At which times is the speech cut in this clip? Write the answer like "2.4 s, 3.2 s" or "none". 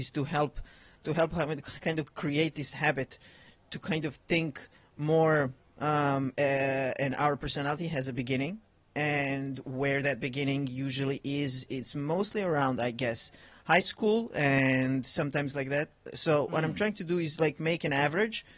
6.3 s